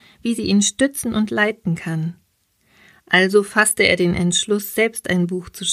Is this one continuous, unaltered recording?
yes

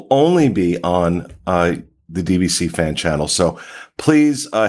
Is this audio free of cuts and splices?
yes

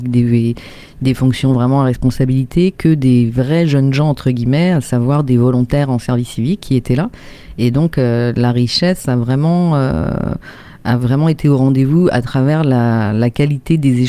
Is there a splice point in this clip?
no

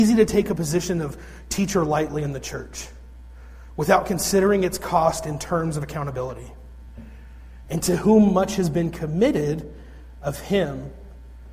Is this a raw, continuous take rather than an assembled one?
no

